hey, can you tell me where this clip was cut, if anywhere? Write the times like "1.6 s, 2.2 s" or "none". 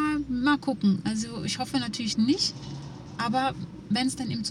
none